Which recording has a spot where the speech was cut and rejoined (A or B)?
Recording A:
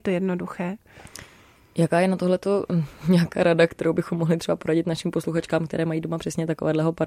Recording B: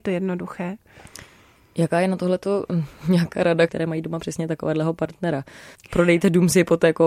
B